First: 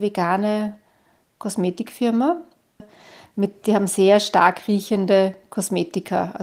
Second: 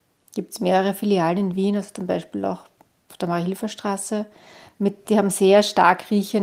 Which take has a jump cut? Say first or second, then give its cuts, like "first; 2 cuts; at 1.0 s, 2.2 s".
first; 1 cut; at 2.8 s